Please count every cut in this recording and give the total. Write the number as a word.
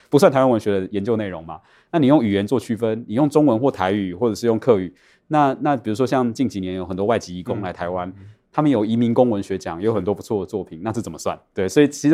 zero